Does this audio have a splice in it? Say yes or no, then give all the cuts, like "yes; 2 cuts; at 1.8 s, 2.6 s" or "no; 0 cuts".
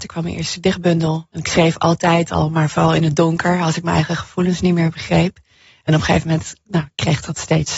no; 0 cuts